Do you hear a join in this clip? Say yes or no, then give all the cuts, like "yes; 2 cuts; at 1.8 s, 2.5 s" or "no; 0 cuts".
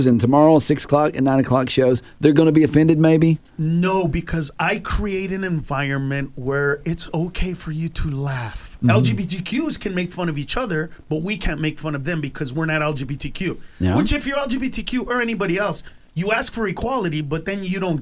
yes; 2 cuts; at 3.5 s, 8.8 s